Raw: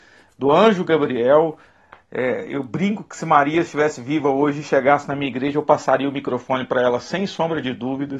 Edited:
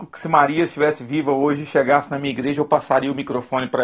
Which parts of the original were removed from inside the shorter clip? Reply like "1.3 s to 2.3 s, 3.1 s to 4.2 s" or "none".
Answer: none